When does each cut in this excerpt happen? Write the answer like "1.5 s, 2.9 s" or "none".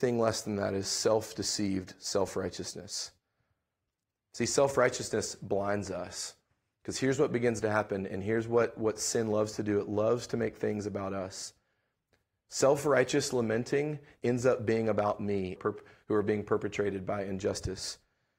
15.6 s

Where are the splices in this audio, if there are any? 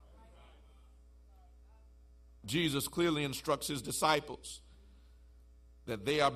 none

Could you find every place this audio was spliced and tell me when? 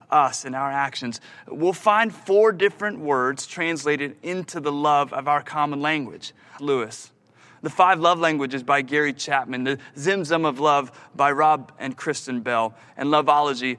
6.6 s

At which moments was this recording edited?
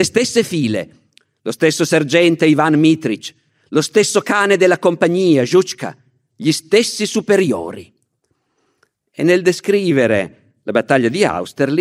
none

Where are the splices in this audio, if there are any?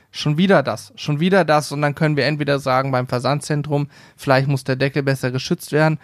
none

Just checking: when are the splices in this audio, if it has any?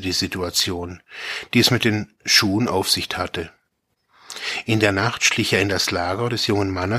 none

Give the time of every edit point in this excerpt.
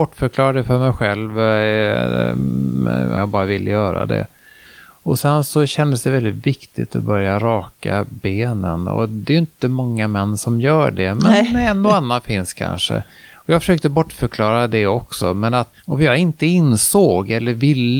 3.1 s, 15.8 s

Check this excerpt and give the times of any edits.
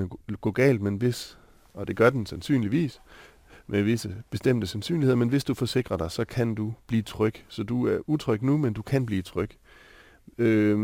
none

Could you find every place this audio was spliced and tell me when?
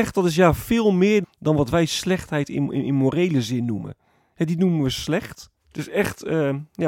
1.2 s, 4.2 s, 5.6 s

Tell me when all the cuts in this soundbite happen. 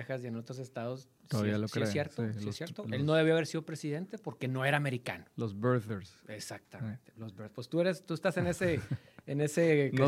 none

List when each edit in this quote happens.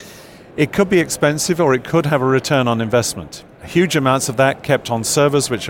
3.5 s

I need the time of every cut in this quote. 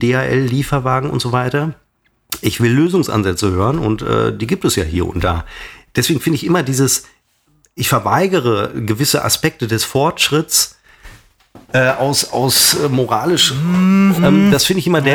14.2 s

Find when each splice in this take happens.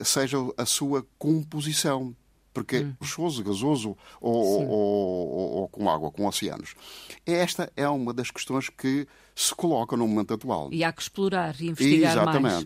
3.0 s

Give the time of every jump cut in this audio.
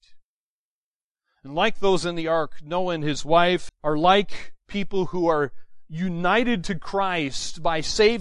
3.7 s

